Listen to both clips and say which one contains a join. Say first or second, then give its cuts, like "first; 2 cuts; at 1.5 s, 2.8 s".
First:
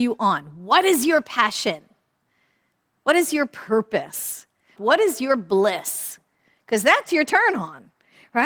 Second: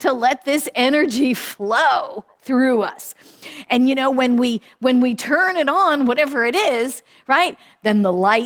first; 1 cut; at 4.8 s